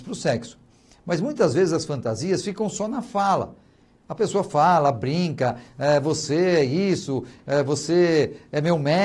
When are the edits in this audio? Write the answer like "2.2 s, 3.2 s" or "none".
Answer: none